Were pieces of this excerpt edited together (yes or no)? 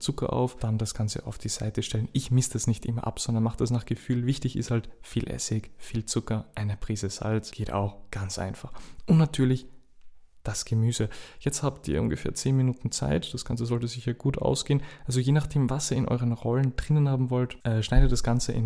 no